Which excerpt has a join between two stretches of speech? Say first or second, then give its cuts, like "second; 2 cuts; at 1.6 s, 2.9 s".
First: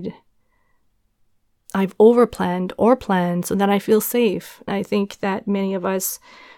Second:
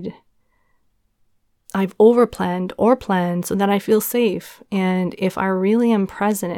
first; 1 cut; at 4.7 s